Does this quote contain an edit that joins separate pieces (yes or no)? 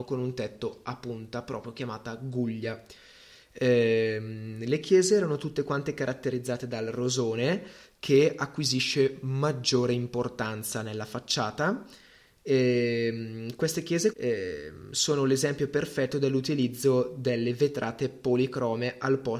yes